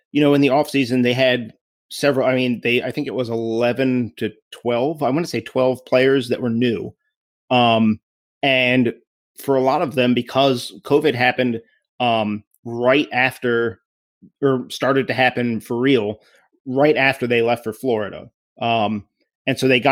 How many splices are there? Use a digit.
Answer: 0